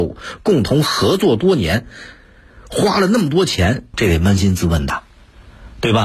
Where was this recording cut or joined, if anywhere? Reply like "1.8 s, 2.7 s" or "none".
3.9 s